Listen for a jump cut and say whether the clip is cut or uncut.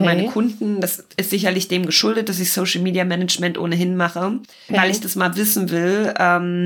cut